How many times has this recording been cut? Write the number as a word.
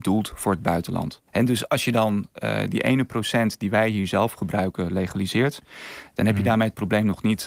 one